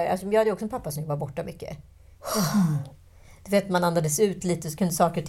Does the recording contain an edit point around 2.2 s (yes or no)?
yes